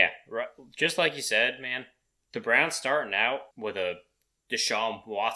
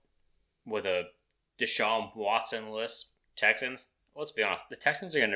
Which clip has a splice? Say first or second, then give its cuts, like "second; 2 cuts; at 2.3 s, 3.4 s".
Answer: first; 2 cuts; at 2.2 s, 3.5 s